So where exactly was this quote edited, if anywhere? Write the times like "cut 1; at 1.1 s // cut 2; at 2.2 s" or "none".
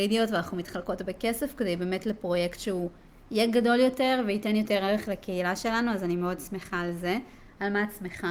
none